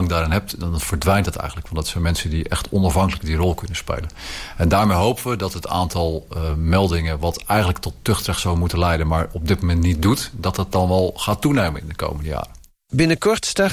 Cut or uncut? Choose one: uncut